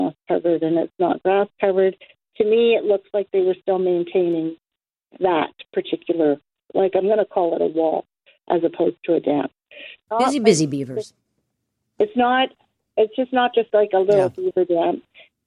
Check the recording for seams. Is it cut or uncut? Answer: cut